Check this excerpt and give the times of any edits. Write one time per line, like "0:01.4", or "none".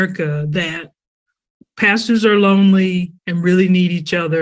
none